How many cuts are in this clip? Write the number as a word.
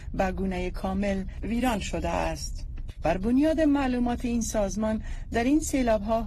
one